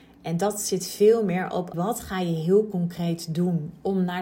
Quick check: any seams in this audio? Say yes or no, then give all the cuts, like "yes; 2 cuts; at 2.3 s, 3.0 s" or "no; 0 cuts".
yes; 1 cut; at 1.7 s